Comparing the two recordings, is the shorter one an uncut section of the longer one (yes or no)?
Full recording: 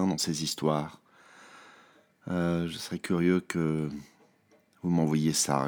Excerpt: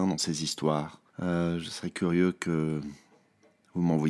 no